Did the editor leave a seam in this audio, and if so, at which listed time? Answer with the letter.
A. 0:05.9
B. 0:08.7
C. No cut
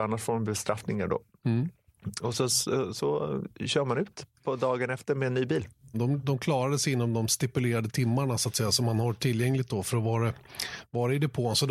A